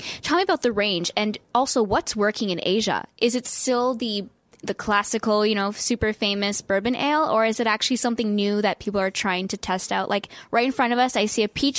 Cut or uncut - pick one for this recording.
uncut